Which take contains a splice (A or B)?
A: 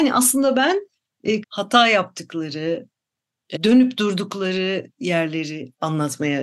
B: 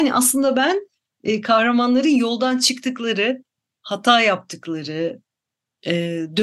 A